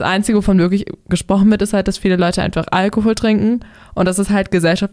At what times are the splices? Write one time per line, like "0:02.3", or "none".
none